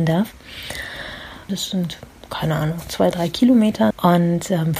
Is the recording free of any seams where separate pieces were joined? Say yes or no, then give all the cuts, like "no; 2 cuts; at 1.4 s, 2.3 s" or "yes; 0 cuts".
no; 2 cuts; at 1.5 s, 3.9 s